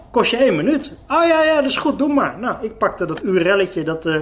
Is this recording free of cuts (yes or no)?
no